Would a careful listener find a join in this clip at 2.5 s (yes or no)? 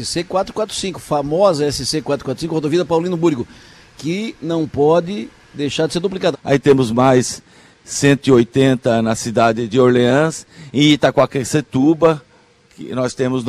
no